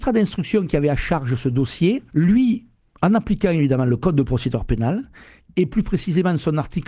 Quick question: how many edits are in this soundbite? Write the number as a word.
one